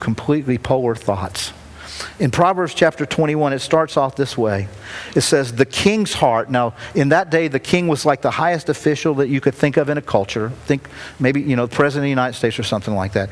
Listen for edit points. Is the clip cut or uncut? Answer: uncut